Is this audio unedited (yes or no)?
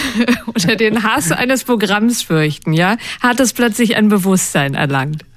yes